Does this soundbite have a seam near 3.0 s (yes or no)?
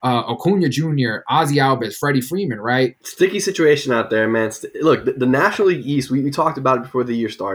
yes